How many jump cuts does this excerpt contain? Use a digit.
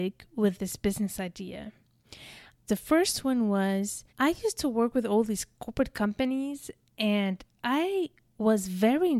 2